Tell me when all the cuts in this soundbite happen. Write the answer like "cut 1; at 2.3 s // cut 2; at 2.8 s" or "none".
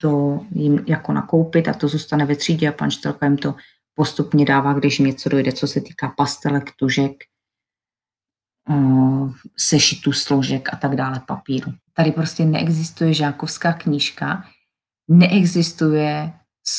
cut 1; at 11.8 s